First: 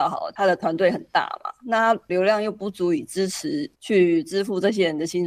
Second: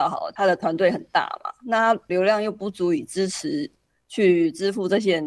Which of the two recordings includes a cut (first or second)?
first